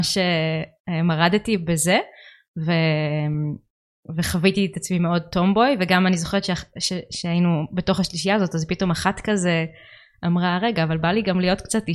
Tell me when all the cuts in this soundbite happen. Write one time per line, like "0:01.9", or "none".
none

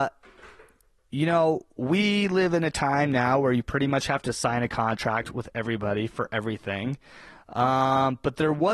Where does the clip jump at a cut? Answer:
none

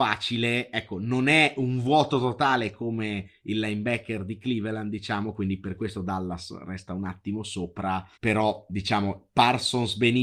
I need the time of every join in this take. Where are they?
0:08.1

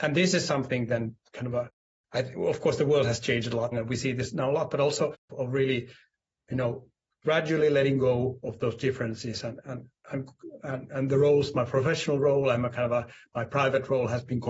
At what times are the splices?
0:03.7
0:05.3

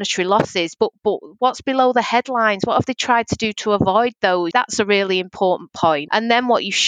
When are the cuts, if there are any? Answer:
0:04.5

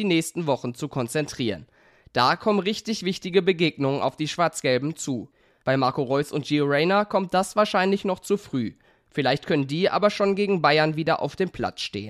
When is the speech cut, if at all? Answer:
0:05.6

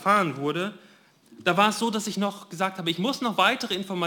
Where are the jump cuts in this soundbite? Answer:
none

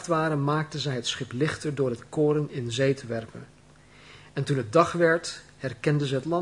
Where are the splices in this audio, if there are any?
none

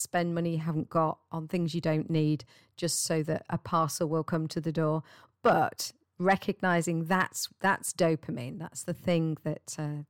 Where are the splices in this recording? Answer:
none

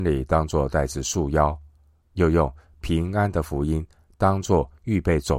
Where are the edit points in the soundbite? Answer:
0:02.0

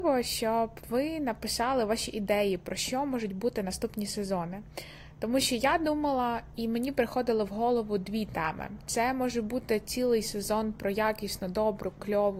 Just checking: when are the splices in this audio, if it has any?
none

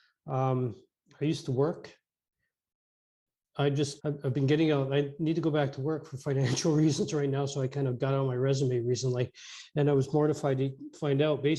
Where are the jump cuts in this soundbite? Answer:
0:04.0

